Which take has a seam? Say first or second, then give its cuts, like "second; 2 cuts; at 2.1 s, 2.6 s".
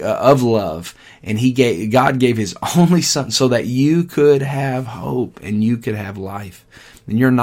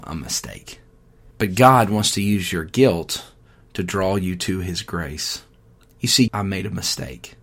second; 2 cuts; at 1.3 s, 6.3 s